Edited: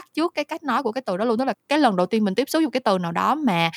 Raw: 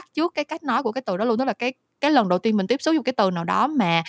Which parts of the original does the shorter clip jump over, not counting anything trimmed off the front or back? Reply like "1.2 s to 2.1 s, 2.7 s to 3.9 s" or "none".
1.5 s to 1.9 s

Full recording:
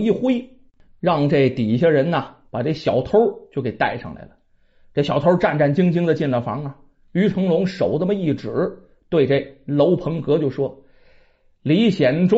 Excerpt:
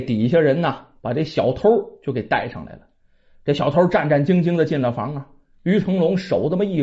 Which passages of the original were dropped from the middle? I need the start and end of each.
none

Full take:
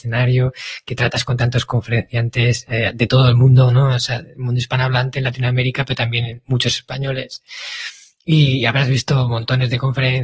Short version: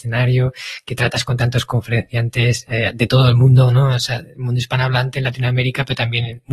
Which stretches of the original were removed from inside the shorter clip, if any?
none

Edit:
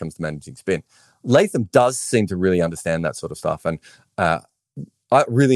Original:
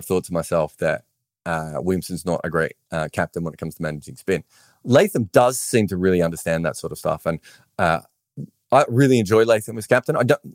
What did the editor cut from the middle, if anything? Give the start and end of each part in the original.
none

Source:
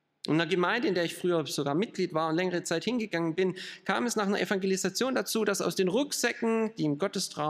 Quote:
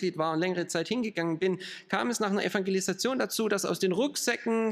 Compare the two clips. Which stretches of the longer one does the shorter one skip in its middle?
none

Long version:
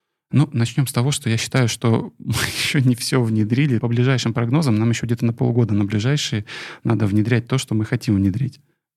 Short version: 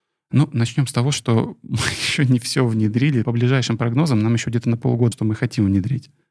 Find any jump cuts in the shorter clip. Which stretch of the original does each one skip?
1.1 s to 1.7 s, 5.7 s to 7.6 s

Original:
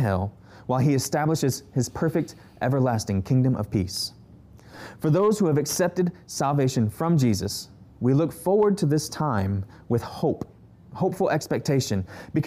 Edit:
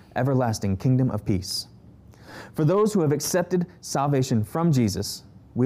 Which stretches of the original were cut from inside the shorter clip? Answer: none

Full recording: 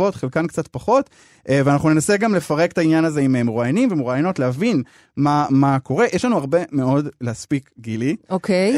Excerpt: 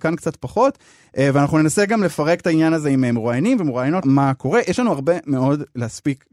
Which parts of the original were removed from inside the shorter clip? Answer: 4.3 s to 5.5 s

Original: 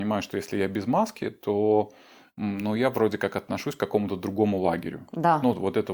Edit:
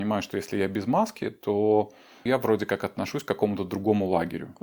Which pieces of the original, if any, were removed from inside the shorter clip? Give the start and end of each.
2.3 s to 2.8 s

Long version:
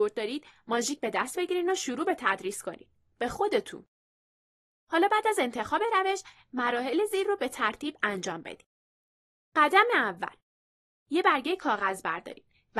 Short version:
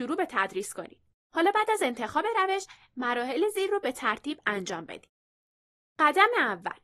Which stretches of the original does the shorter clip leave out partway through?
3.0 s to 4.7 s

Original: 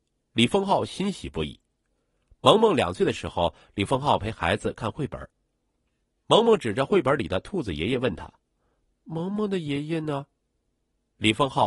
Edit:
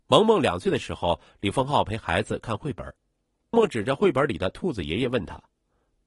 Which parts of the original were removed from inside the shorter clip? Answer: 5.9 s to 6.4 s

